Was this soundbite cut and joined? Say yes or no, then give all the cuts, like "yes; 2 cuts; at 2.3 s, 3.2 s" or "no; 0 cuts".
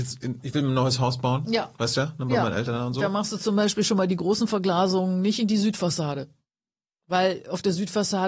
no; 0 cuts